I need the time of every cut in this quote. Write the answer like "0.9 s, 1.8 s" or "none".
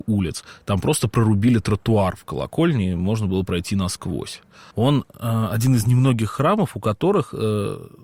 4.7 s